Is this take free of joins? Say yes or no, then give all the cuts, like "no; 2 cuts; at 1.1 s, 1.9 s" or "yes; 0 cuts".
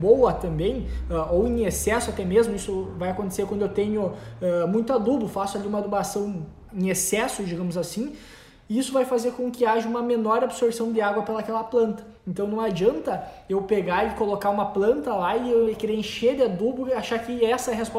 yes; 0 cuts